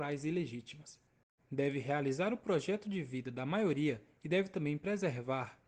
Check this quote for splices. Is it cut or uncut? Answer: cut